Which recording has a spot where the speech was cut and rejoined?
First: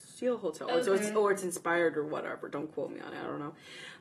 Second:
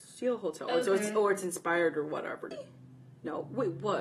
second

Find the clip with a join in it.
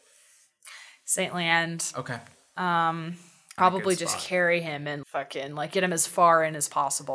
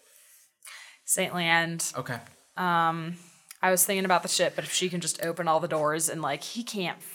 first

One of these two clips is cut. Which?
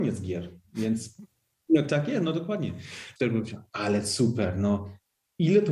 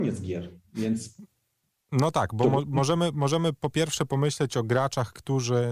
first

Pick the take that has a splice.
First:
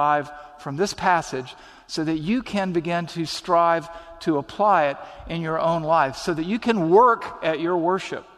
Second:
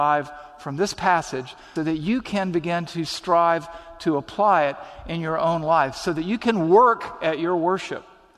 second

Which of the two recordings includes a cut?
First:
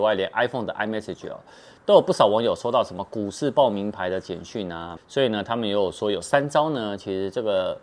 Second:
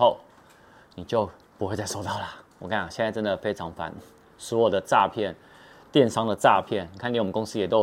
first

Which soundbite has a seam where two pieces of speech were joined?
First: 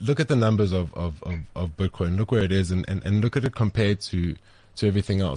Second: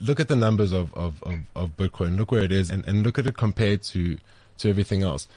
second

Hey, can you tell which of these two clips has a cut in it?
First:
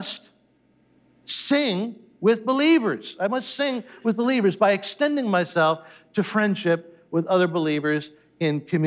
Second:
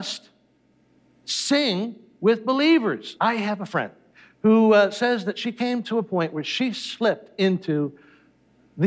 second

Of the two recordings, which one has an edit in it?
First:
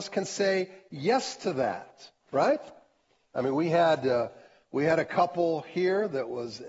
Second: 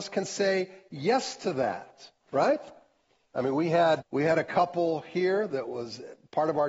second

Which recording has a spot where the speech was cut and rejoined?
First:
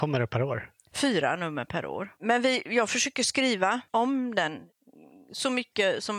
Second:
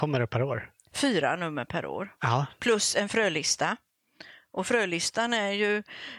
first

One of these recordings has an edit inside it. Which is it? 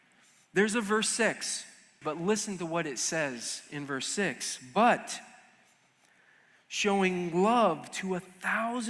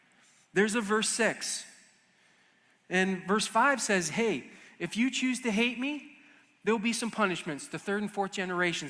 first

